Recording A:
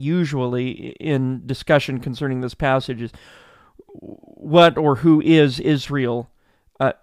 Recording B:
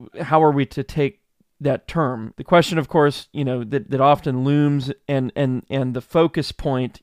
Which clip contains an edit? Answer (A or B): B